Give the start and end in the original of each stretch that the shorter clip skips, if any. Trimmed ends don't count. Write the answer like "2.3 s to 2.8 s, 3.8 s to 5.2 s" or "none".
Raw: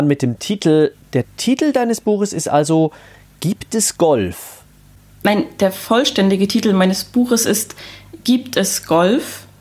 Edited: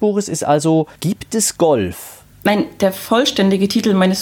3.0 s to 3.4 s, 4.7 s to 5.1 s